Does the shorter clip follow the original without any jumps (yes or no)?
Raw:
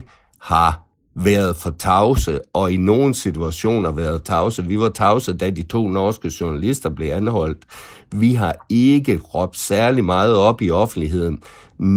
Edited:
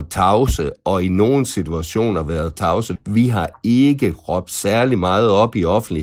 no